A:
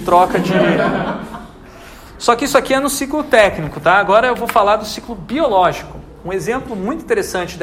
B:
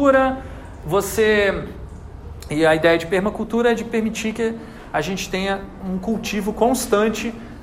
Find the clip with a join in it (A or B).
B